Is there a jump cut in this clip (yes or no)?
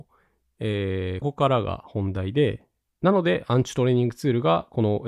yes